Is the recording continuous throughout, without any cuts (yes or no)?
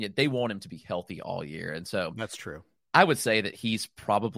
yes